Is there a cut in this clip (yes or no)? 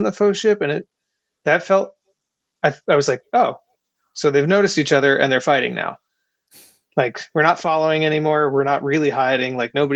no